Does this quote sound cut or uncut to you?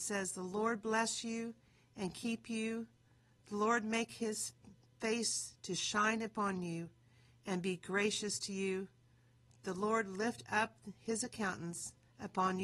uncut